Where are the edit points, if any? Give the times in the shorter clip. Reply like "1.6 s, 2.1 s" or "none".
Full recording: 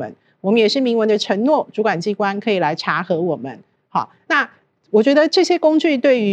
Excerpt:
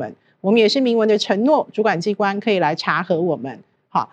none